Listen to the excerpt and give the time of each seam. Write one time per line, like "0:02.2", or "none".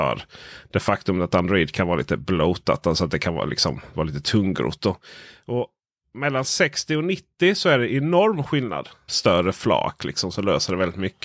0:09.1